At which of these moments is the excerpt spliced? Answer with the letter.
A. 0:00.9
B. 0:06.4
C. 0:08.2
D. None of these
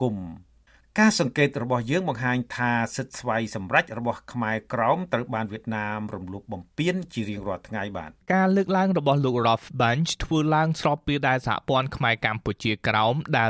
C